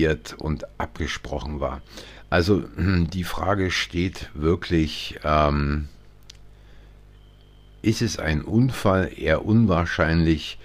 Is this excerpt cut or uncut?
uncut